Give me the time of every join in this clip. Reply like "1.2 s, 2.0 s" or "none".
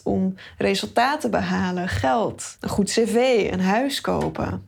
2.6 s